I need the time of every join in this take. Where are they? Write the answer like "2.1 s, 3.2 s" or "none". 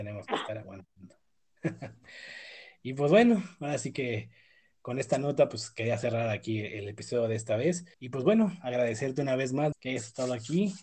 7.9 s, 9.7 s